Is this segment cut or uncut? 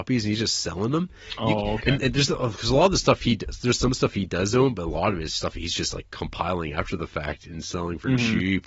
uncut